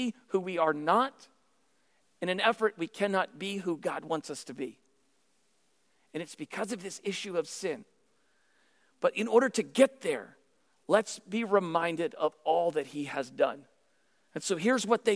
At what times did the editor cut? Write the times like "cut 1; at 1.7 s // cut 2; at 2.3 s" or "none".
none